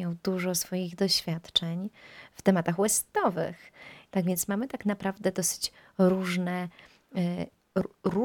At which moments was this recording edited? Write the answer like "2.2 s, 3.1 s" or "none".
4.1 s